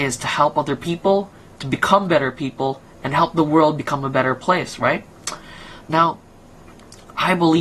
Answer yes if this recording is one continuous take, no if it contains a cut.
yes